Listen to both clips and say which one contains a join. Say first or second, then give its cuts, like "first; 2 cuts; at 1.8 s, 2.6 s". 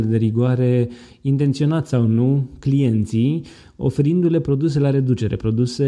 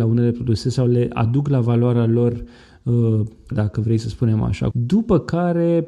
second; 2 cuts; at 3.5 s, 4.7 s